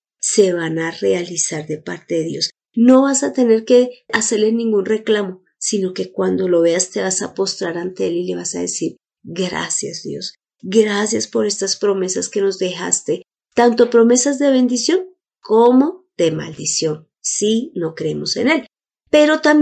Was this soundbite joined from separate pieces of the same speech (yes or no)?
no